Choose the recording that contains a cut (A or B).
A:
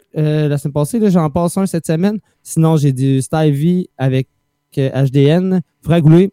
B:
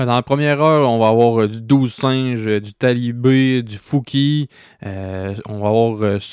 A